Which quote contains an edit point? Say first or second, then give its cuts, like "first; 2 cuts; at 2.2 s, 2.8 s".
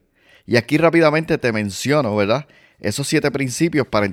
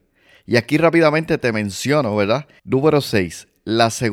second; 1 cut; at 2.6 s